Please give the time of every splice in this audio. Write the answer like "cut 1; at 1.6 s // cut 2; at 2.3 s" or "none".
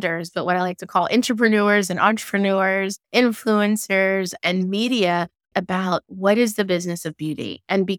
cut 1; at 3.0 s // cut 2; at 5.5 s